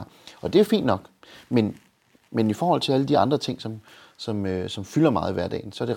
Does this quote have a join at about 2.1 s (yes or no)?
no